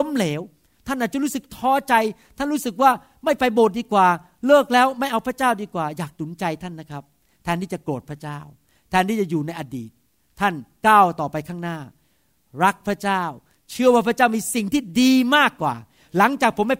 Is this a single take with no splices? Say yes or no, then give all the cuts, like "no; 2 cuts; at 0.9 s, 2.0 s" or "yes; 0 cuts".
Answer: yes; 0 cuts